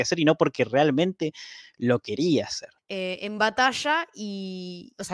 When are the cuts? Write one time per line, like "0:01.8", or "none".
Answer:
0:02.8